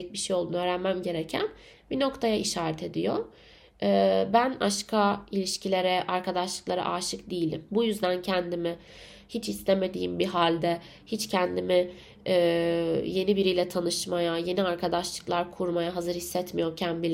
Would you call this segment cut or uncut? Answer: cut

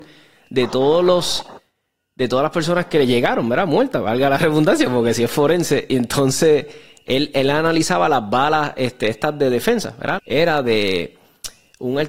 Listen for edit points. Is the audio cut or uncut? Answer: cut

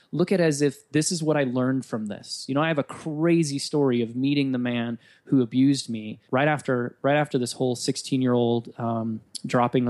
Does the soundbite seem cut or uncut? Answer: cut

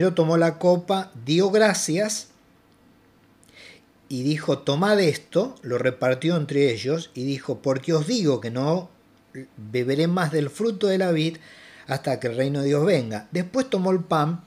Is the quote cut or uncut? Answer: uncut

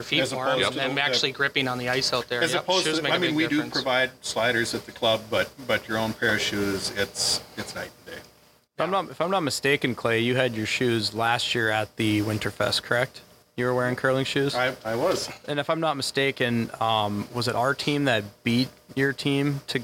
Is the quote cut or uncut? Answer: uncut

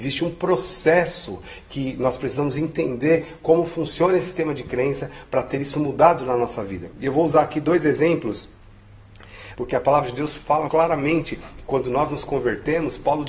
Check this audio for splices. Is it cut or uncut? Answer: cut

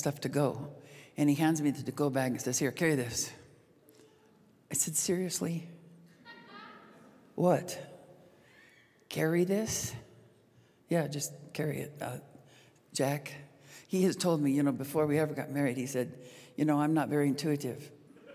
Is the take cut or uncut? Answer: uncut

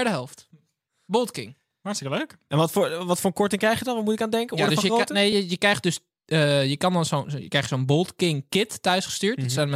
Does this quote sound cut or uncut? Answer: uncut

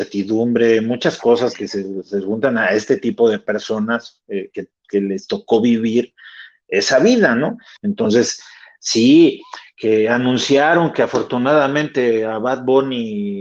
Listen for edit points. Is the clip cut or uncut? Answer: cut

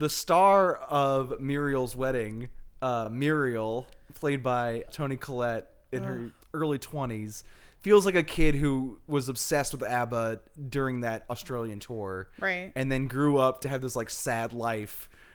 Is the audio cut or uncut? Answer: uncut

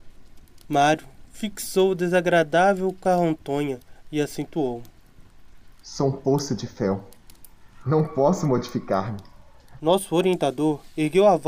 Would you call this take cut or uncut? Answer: cut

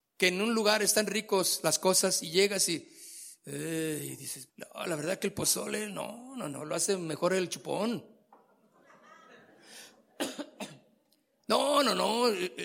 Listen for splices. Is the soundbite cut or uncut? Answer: cut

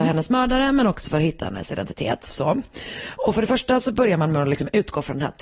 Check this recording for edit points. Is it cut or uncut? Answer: uncut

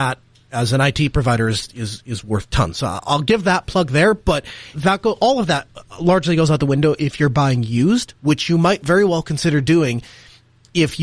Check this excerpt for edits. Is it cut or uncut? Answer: cut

